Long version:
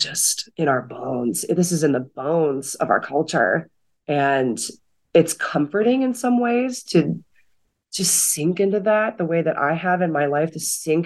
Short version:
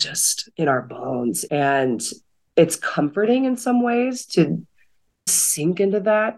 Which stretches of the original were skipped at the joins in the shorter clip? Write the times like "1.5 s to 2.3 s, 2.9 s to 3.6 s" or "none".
1.5 s to 4.0 s, 7.8 s to 8.1 s